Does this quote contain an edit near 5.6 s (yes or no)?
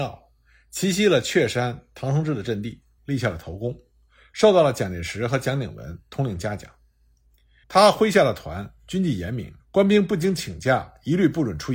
no